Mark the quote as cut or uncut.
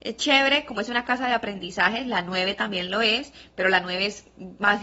uncut